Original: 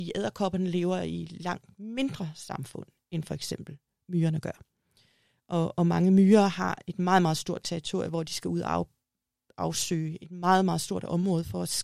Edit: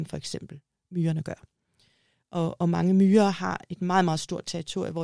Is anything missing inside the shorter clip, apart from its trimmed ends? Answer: no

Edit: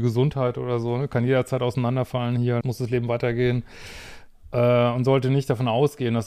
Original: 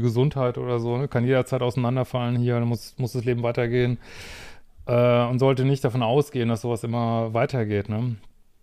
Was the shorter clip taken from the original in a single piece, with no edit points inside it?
no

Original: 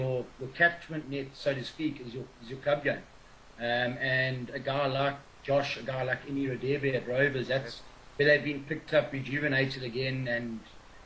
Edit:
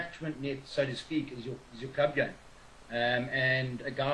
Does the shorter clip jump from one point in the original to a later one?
no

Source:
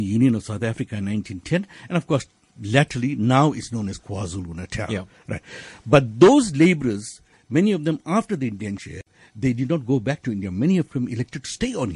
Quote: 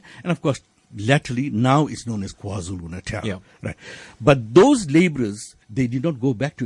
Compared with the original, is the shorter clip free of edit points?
no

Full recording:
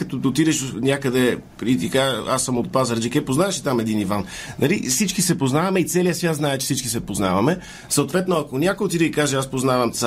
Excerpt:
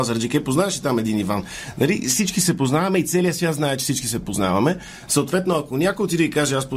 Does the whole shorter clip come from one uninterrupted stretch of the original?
yes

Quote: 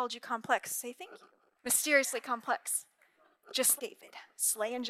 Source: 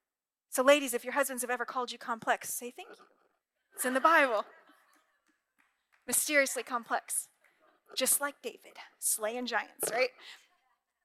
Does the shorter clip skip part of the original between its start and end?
yes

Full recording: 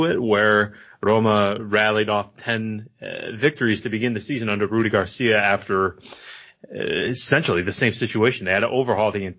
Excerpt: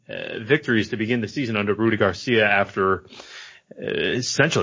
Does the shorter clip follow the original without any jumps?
yes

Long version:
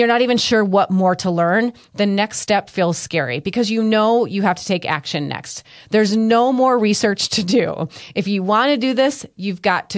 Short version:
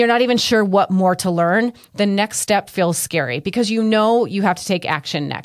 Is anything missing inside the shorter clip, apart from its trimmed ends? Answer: no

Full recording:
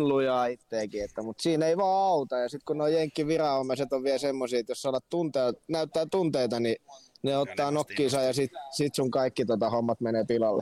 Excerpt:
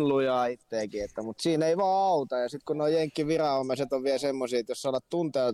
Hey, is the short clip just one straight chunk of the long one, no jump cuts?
yes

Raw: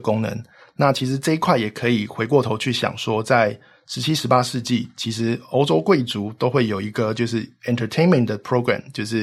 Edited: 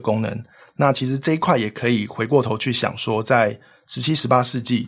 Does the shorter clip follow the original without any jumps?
yes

